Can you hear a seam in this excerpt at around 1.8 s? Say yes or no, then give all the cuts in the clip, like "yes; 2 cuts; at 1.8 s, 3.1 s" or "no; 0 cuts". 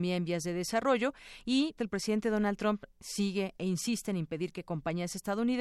yes; 1 cut; at 1.8 s